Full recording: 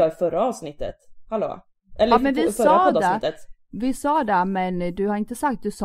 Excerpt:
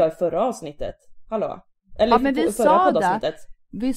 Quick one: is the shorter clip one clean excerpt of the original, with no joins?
yes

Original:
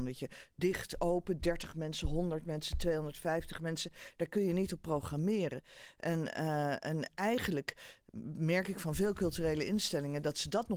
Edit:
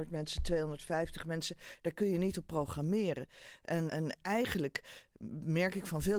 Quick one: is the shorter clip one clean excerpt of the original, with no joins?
no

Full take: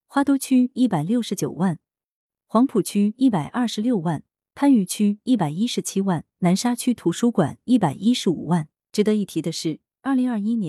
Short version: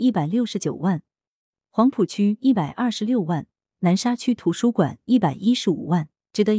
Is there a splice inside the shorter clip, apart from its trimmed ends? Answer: yes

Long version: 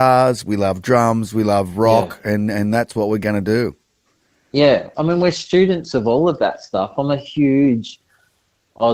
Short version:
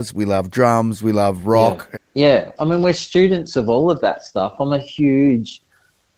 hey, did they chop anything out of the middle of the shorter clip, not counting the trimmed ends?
yes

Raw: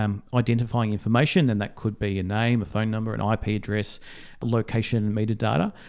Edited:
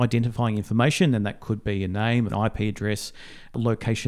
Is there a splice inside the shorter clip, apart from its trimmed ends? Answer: yes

